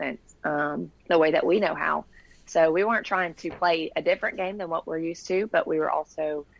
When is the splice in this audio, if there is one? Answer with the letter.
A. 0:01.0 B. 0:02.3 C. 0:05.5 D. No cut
A